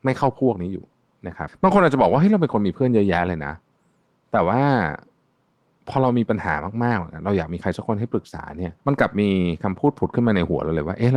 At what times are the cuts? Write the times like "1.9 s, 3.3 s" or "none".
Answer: 1.5 s, 8.8 s